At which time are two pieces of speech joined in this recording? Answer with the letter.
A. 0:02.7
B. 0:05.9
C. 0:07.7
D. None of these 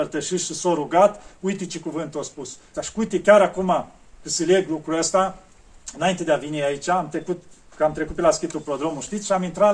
A